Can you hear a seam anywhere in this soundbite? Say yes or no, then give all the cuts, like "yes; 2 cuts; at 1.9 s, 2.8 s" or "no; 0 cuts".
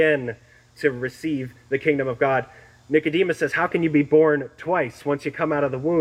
no; 0 cuts